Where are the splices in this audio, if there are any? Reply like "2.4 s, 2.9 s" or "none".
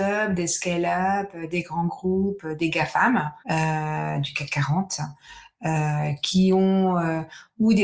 3.4 s